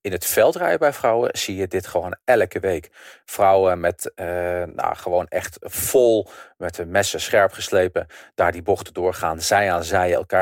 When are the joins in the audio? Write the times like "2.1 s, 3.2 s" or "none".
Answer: none